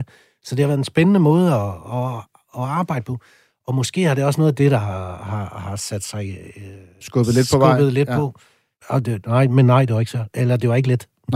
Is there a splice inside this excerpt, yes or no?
yes